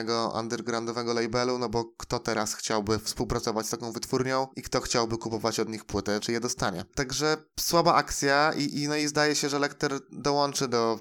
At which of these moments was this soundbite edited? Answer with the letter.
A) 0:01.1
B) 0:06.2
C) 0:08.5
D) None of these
B